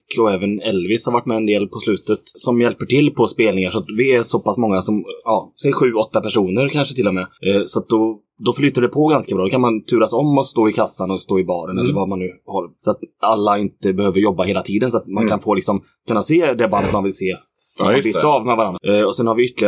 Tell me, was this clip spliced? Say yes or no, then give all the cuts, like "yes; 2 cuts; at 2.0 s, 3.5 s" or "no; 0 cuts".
yes; 1 cut; at 18.8 s